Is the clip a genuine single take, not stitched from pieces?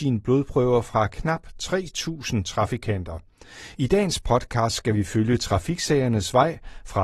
yes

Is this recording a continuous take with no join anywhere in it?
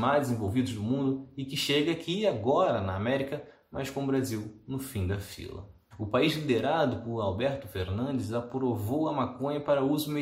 no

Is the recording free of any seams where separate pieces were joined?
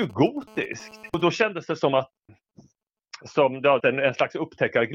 no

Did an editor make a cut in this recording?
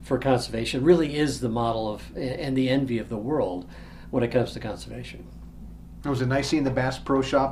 no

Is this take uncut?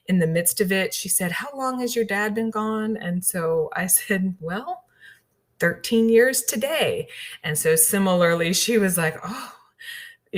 yes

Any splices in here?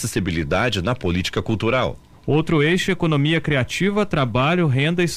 no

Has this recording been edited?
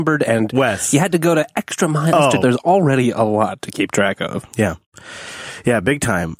yes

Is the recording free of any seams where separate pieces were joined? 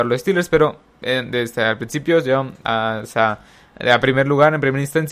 yes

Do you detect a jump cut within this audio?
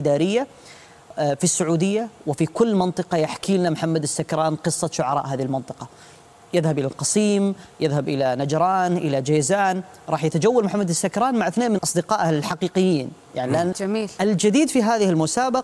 yes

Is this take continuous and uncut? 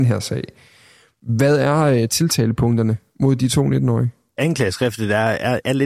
yes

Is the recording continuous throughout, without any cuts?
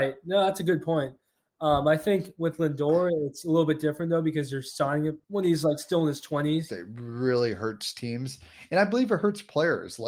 no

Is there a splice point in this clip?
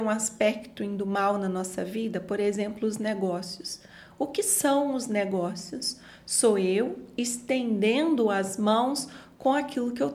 no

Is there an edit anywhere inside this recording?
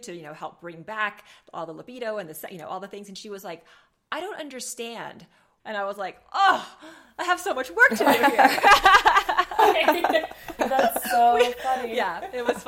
yes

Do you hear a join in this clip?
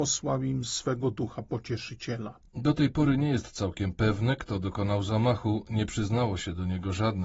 no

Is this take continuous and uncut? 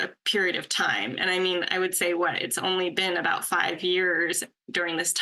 yes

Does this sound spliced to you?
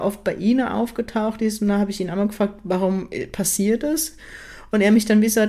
no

